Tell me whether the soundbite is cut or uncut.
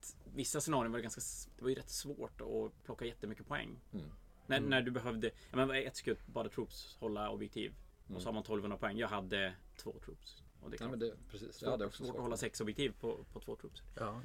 uncut